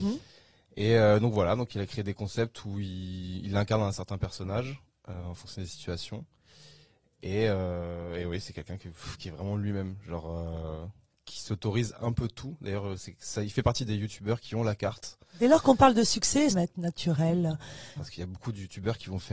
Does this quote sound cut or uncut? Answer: cut